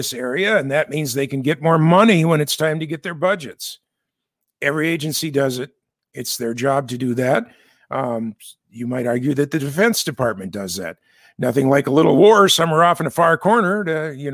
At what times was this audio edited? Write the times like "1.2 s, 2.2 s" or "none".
none